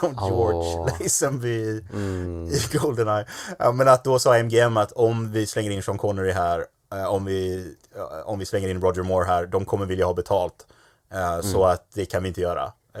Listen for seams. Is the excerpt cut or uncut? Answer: uncut